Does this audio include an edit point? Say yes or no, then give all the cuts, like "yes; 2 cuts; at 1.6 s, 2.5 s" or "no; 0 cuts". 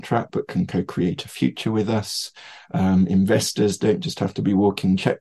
no; 0 cuts